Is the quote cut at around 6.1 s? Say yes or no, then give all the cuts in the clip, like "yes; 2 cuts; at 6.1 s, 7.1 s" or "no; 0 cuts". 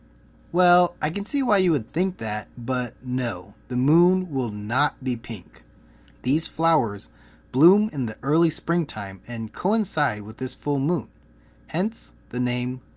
yes; 1 cut; at 6.1 s